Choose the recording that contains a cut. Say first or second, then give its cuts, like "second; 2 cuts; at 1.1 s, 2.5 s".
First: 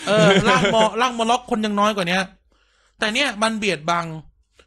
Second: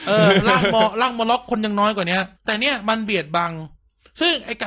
second; 1 cut; at 2.4 s